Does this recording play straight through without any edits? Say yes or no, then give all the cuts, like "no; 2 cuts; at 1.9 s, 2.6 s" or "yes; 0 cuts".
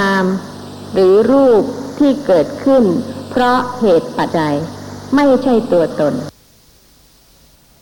no; 1 cut; at 4.3 s